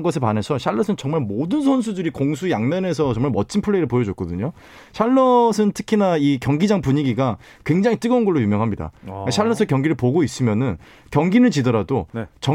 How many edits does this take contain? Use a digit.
0